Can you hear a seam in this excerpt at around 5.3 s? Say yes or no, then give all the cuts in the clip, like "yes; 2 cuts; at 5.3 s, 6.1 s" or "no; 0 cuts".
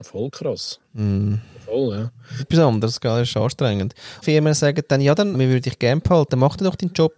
yes; 3 cuts; at 2.4 s, 4.2 s, 5.3 s